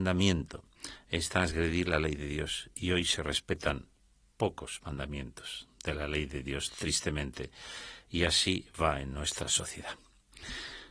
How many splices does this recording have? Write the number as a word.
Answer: zero